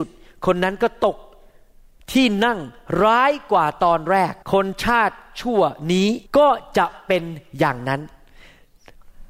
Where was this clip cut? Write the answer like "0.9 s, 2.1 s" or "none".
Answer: 4.4 s, 6.3 s